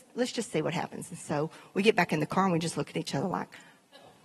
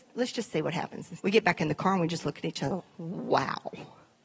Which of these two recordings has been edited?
second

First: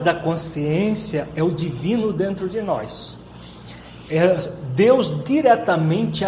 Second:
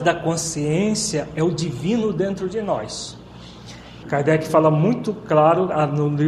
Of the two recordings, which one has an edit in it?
second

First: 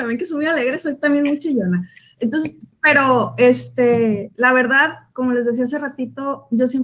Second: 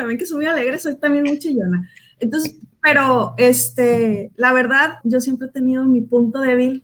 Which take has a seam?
second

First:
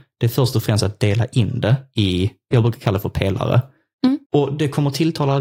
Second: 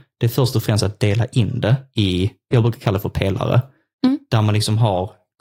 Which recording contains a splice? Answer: first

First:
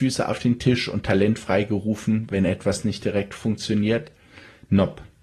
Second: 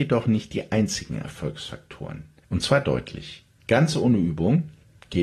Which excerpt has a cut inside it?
second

